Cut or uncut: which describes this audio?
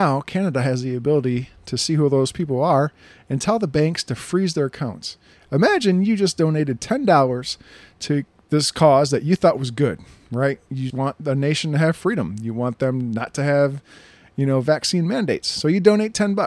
cut